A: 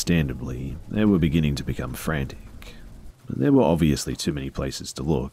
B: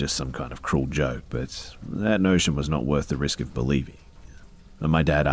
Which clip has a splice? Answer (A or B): A